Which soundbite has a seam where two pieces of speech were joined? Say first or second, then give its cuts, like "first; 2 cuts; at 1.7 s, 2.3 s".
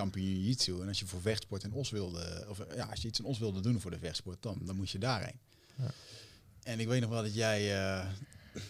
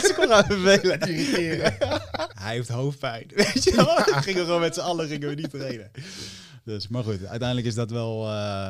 second; 1 cut; at 2.3 s